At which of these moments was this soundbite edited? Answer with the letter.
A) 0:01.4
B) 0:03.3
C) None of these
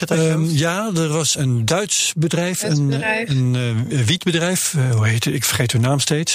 A